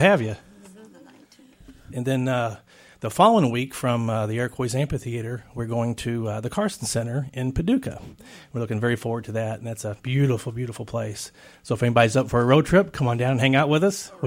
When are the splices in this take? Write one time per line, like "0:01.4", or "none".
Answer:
0:01.9